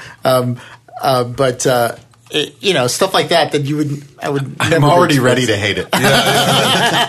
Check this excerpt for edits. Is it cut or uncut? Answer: uncut